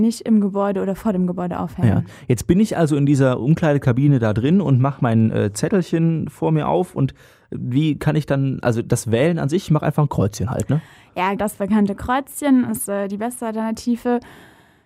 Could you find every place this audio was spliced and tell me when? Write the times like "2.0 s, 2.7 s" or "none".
11.4 s